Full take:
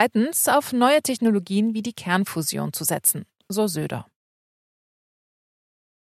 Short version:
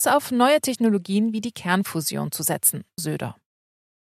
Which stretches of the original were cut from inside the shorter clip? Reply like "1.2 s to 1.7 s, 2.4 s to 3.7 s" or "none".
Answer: 3.4 s to 3.7 s